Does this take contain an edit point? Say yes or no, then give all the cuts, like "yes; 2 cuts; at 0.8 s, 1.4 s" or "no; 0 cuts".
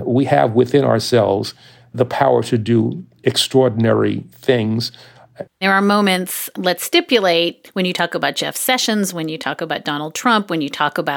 yes; 1 cut; at 5.5 s